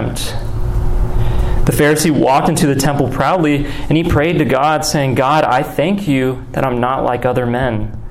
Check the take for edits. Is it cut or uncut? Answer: uncut